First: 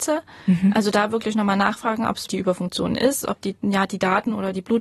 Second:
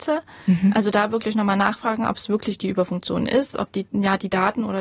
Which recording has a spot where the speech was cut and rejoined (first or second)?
first